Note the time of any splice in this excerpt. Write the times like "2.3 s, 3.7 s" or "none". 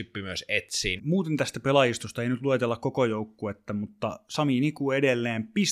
1.0 s